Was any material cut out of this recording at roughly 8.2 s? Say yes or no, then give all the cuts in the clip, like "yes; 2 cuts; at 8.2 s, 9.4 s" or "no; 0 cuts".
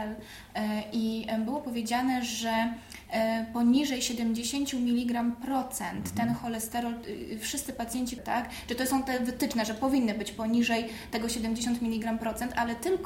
yes; 1 cut; at 8.2 s